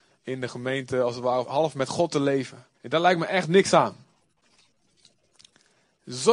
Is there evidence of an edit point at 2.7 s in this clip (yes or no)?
yes